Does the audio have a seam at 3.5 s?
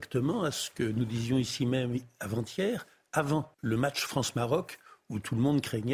yes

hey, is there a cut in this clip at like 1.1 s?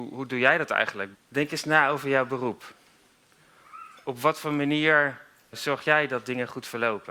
yes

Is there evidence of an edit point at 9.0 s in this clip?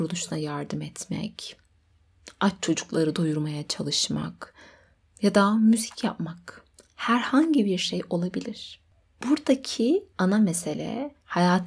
no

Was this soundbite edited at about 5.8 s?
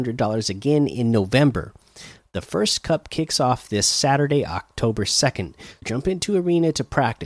yes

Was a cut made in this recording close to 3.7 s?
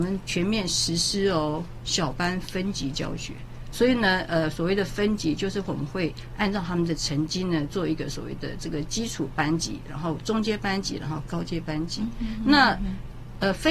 yes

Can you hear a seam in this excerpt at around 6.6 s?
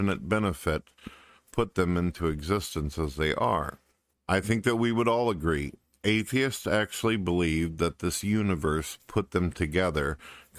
no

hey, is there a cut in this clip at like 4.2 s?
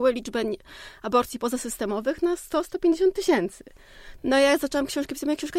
yes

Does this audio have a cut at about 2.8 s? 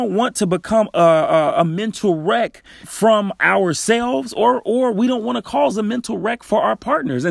yes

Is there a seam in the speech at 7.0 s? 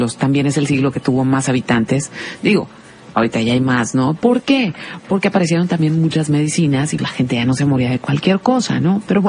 yes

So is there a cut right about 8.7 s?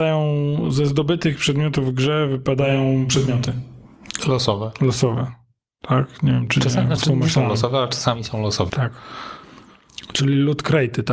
yes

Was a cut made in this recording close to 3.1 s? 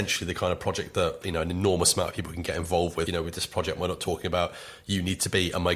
yes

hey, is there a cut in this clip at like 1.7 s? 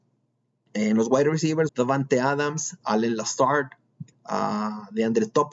yes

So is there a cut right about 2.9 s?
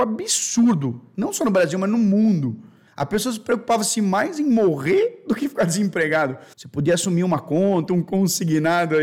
yes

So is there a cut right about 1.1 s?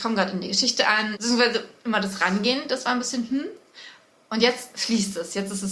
yes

